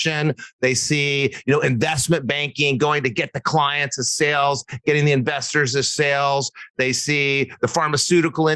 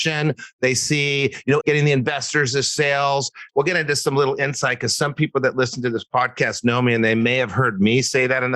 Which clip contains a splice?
second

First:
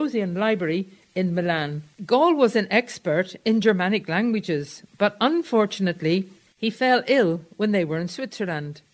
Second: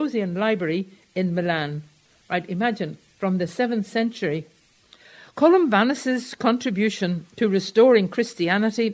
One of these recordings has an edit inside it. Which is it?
first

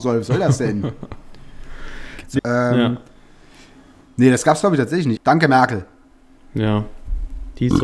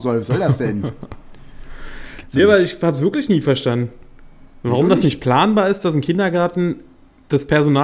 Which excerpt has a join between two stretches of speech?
first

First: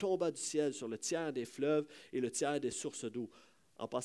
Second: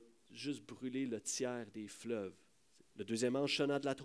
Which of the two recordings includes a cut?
second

